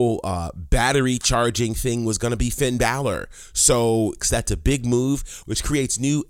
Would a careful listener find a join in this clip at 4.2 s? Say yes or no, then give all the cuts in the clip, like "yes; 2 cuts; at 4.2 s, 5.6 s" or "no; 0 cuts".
yes; 1 cut; at 4.2 s